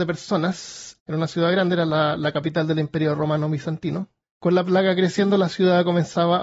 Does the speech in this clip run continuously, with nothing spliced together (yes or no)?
no